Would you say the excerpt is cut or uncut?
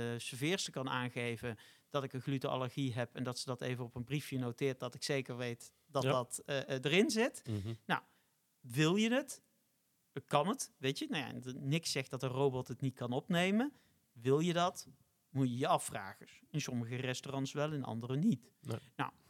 uncut